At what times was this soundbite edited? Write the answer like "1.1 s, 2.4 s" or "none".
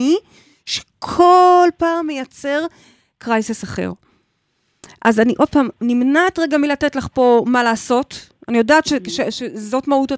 none